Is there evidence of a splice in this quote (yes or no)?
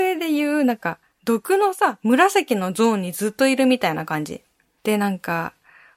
yes